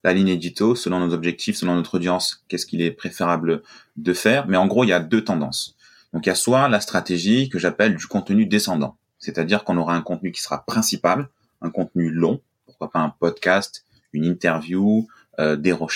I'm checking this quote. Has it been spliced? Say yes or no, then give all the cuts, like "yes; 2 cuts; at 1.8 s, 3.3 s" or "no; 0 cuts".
no; 0 cuts